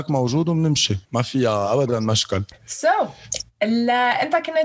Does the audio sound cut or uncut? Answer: cut